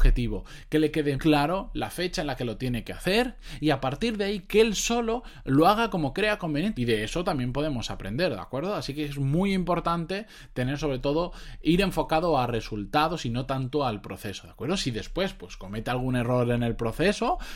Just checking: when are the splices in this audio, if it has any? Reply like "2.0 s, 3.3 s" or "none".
1.2 s, 6.7 s